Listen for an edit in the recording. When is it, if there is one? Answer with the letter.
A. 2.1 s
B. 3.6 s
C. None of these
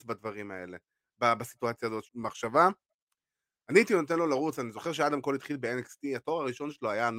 A